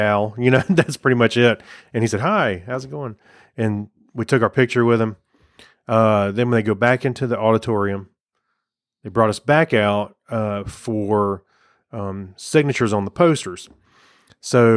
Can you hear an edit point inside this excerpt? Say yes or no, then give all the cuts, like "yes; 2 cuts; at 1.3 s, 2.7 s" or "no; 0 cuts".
no; 0 cuts